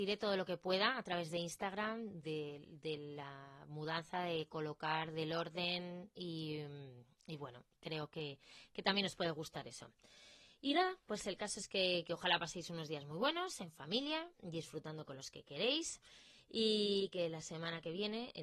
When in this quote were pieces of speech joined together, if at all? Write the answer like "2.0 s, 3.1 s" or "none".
2.2 s